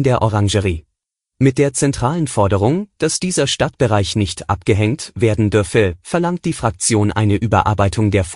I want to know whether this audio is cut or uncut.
cut